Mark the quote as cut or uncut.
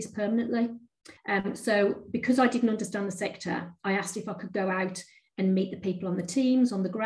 cut